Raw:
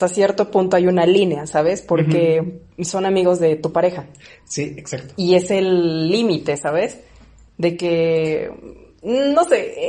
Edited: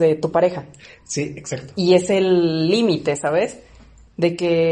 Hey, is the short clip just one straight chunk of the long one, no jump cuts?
yes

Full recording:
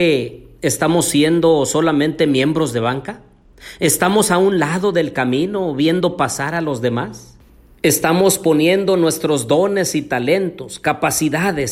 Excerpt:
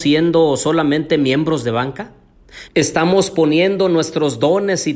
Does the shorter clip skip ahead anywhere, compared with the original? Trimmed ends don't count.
yes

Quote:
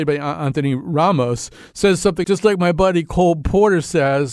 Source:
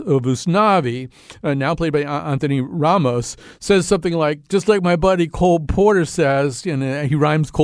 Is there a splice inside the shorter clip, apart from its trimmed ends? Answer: yes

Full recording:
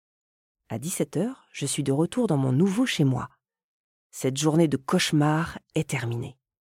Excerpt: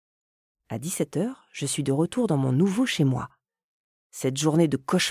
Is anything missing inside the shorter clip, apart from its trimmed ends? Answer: no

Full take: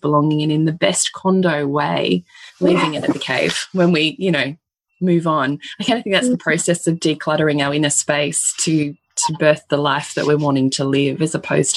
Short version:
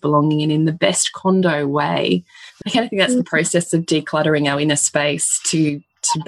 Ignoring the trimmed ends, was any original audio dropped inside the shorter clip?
yes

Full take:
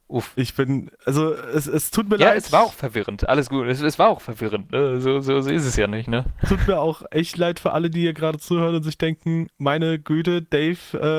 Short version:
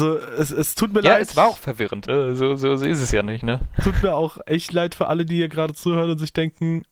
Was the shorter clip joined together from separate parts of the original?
yes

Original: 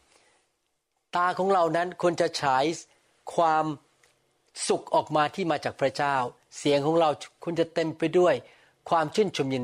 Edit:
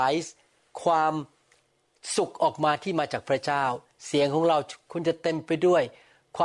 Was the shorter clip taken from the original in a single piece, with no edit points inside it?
yes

